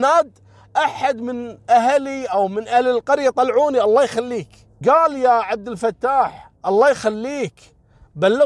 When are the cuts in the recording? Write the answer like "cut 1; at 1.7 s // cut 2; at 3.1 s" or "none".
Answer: cut 1; at 4.8 s // cut 2; at 6.6 s